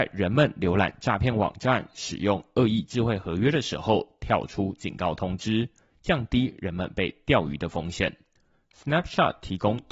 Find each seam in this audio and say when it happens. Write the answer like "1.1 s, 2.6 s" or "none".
none